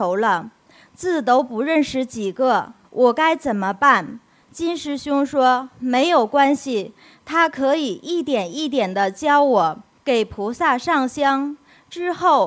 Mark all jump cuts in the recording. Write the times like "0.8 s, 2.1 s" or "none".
2.8 s, 10.0 s